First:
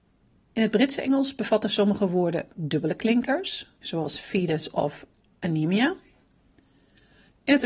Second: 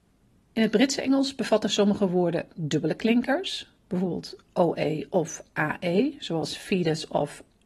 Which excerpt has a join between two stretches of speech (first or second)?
first